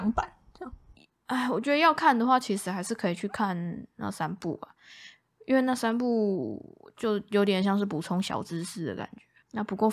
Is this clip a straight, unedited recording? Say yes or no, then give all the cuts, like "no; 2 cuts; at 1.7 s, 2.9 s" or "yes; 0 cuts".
yes; 0 cuts